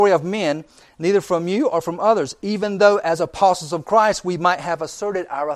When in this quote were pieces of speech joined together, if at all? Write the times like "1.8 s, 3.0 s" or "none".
none